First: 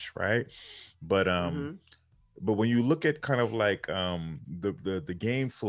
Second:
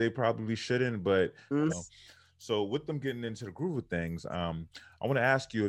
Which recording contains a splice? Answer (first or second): second